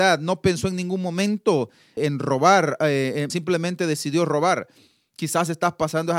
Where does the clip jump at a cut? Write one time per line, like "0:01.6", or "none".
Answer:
0:02.0
0:03.3

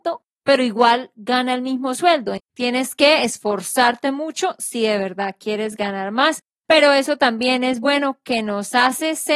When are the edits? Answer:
0:02.4

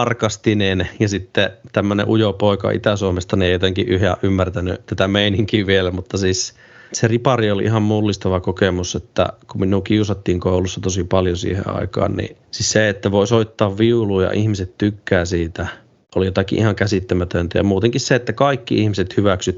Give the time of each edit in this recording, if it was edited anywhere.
none

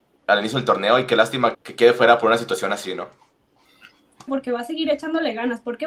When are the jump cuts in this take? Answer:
0:01.5
0:04.3

